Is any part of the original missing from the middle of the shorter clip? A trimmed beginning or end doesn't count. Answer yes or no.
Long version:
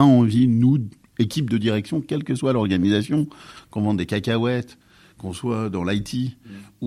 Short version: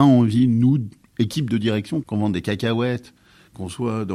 yes